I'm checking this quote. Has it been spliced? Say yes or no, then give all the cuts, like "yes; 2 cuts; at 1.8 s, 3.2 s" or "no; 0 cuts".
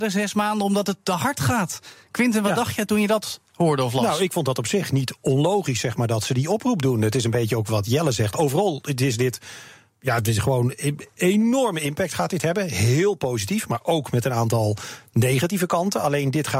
yes; 1 cut; at 7.7 s